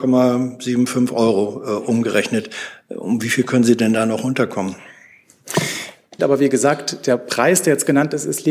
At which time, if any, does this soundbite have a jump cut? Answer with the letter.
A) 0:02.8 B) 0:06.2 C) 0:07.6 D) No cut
B